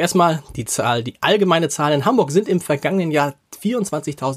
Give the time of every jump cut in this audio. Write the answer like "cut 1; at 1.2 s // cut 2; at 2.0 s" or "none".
none